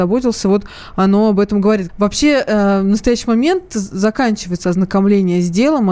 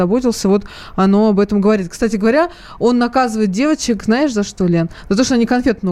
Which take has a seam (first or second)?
first